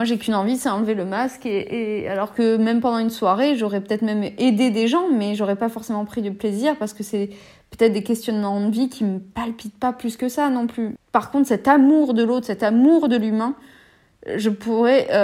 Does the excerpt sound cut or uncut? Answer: cut